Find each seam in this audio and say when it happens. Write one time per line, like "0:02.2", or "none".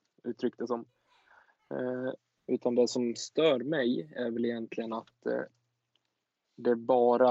0:02.4